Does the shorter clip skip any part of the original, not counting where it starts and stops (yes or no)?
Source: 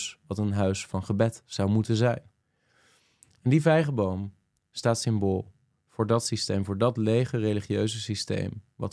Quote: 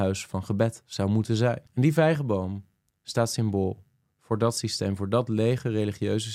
yes